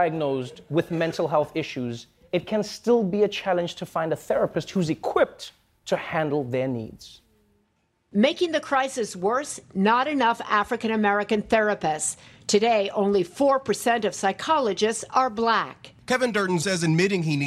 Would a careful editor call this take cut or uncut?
uncut